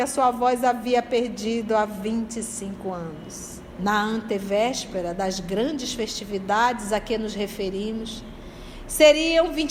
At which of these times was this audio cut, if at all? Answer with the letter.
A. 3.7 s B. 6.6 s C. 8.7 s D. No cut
A